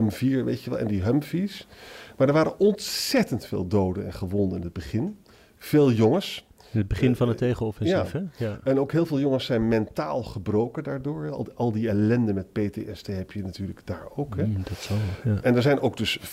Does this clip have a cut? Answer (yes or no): no